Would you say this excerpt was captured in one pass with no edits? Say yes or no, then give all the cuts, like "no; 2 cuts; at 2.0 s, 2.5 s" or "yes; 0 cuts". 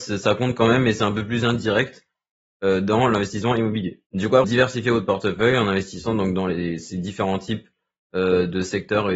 no; 1 cut; at 4.4 s